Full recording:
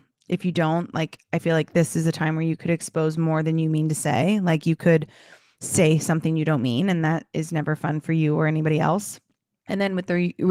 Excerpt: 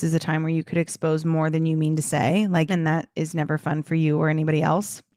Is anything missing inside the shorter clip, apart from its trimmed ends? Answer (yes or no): yes